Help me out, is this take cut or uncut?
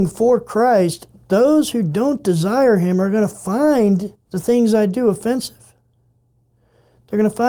cut